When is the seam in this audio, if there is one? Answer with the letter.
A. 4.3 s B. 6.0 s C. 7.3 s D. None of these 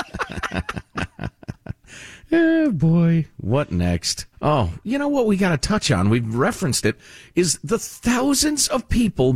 A